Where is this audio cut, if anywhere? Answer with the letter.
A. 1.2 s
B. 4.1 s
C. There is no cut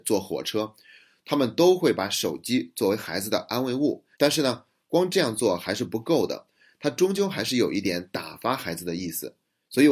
B